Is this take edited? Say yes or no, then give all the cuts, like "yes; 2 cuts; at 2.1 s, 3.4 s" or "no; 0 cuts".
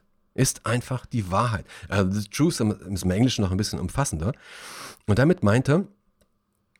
no; 0 cuts